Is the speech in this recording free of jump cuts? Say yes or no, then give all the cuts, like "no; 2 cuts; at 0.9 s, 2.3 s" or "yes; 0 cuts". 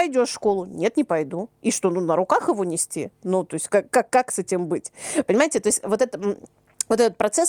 yes; 0 cuts